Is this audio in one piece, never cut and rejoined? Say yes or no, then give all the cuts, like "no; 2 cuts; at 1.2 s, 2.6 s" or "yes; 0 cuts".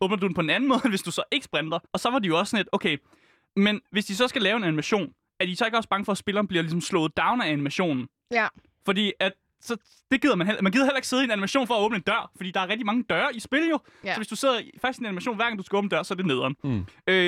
no; 1 cut; at 1.9 s